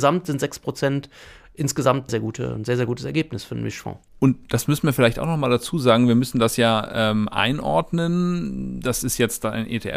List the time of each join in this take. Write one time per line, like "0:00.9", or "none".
0:02.1